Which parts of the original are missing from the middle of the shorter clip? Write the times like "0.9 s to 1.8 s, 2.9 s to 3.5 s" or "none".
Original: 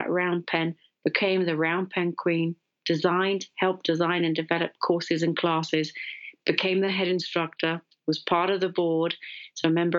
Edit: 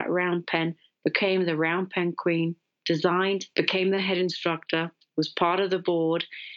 3.5 s to 6.4 s